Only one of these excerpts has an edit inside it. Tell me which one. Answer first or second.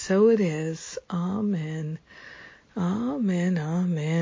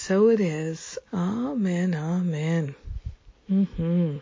second